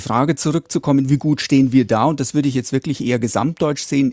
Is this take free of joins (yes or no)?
yes